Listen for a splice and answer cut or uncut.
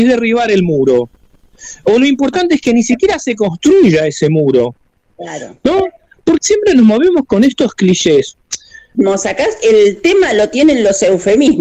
cut